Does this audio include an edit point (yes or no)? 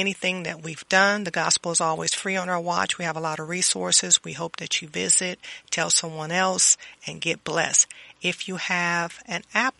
no